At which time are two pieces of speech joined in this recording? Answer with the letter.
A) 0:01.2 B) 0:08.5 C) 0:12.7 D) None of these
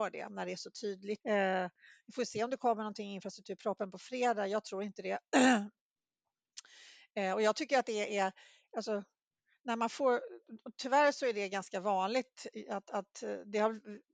A